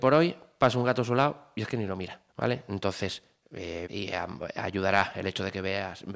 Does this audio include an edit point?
yes; 2 cuts; at 2.3 s, 3.9 s

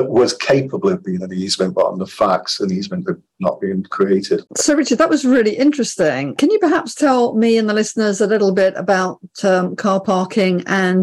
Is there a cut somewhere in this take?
yes; 1 cut; at 4.5 s

